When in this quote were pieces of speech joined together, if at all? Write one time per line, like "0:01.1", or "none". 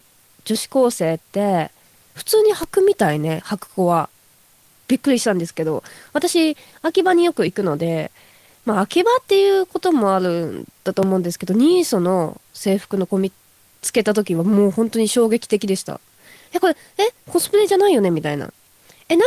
none